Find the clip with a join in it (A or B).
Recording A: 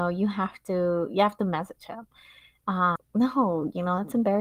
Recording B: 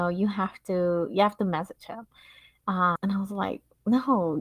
A